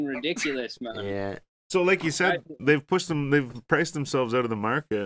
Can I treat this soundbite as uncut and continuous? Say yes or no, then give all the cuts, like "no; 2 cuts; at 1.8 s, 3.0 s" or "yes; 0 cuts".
yes; 0 cuts